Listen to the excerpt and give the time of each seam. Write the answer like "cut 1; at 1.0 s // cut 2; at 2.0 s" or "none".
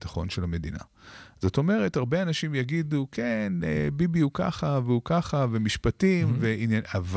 none